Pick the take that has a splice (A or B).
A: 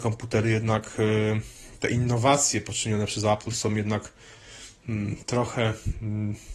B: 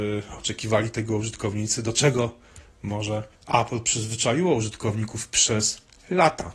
B